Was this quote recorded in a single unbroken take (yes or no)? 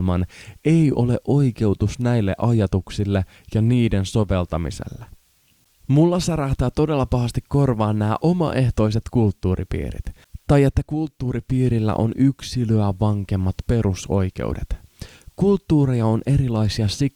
yes